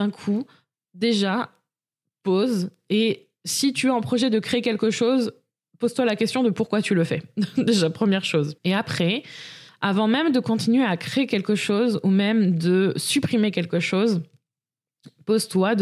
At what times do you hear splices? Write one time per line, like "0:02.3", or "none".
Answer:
0:08.6
0:09.7